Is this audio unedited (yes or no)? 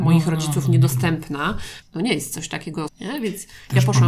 no